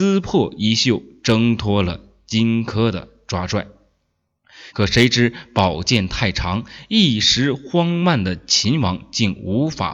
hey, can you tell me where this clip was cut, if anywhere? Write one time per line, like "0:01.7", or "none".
0:04.7